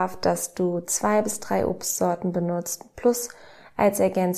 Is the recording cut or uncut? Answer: uncut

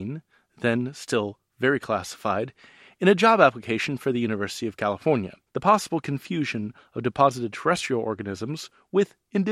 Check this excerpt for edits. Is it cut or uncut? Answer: cut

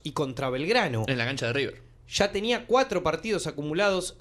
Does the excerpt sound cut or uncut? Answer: uncut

